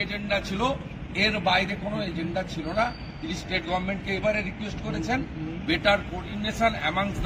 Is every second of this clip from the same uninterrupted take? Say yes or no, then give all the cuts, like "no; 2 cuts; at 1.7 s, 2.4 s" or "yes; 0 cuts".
no; 1 cut; at 4.2 s